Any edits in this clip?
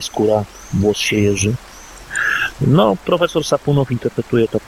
no; 0 cuts

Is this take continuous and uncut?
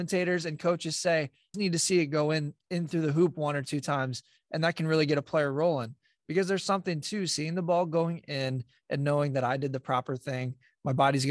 no; 1 cut; at 1.5 s

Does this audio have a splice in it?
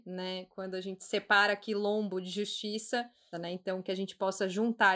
yes; 1 cut; at 3.3 s

